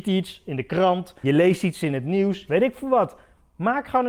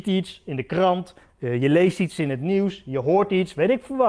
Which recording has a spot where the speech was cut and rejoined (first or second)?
first